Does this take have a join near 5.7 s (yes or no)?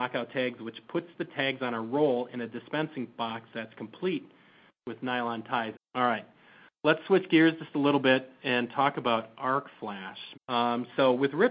yes